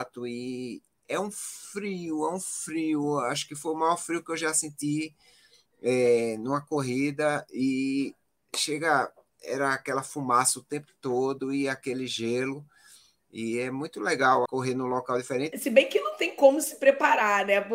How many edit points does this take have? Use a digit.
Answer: 2